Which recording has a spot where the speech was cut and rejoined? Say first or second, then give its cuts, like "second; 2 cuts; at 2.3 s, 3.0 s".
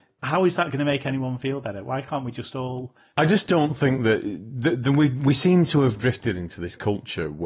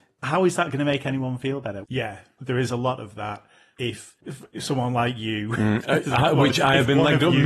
second; 2 cuts; at 1.8 s, 4.2 s